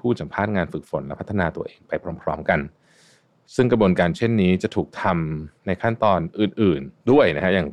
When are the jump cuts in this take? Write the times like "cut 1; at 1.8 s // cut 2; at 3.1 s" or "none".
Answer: cut 1; at 5.6 s